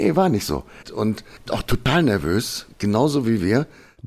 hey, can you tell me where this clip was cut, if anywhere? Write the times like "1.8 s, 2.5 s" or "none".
1.5 s